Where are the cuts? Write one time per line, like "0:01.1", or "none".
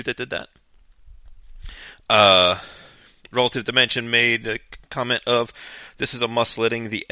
none